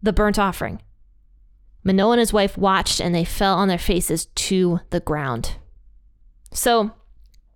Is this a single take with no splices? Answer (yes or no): no